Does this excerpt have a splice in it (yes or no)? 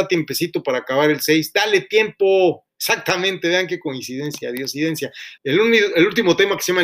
yes